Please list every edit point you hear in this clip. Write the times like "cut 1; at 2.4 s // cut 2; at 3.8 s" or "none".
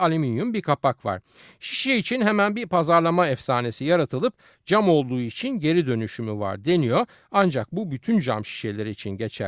none